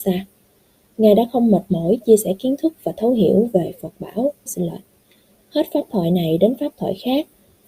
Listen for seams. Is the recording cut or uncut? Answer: cut